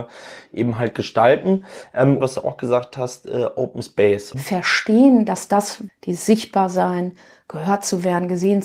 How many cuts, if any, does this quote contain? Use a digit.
3